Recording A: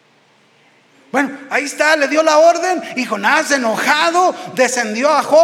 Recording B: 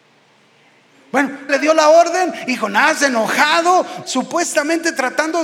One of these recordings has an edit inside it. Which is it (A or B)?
B